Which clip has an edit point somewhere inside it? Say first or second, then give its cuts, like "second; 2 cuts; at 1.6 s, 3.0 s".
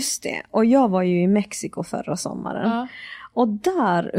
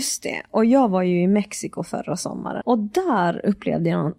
second; 1 cut; at 2.6 s